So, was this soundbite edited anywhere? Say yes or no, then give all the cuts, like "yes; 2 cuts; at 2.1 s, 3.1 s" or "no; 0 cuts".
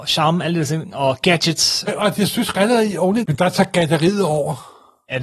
yes; 2 cuts; at 1.9 s, 3.2 s